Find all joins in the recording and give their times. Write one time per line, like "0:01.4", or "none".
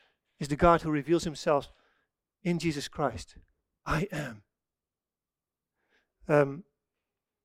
0:03.8